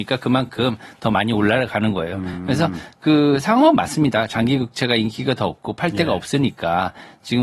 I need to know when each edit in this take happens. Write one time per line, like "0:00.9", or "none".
none